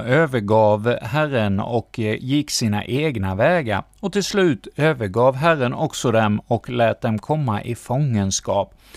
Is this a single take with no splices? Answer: yes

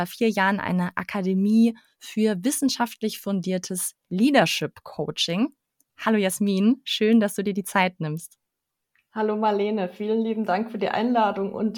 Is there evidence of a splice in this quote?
no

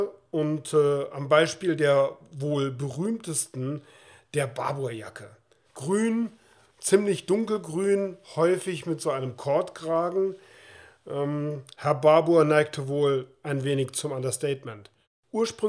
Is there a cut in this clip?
yes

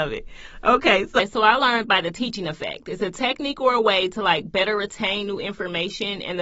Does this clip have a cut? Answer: no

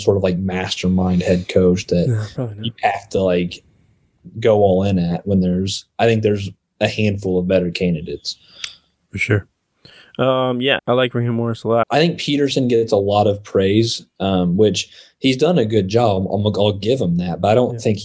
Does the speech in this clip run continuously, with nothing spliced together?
no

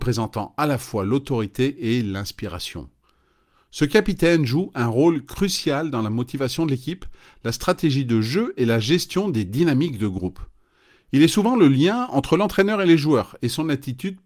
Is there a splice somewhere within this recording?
no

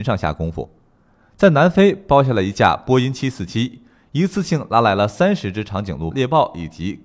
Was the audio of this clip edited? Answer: yes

